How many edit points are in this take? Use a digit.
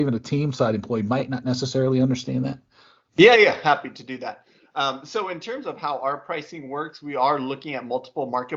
0